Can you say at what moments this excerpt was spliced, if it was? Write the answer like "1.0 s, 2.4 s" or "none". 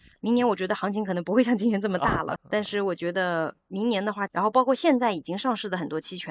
2.4 s, 4.3 s